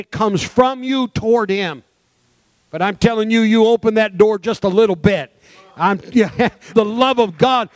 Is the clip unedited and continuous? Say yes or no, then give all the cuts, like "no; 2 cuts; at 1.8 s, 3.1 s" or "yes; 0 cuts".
no; 1 cut; at 6.7 s